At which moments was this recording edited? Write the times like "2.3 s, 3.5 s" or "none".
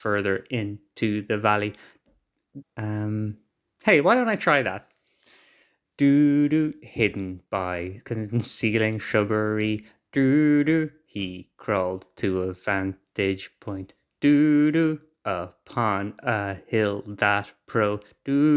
2.6 s